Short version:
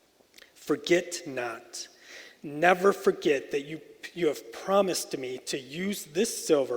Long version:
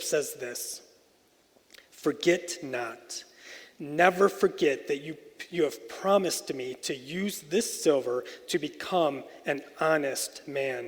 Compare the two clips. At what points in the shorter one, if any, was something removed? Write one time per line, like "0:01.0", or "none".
none